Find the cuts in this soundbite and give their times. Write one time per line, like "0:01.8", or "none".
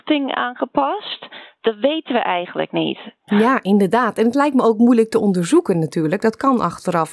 0:03.3